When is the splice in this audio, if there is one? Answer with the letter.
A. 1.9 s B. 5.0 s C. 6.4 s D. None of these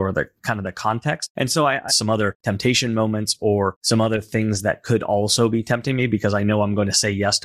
A